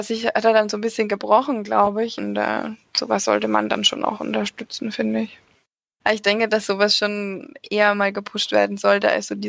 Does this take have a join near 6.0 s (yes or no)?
yes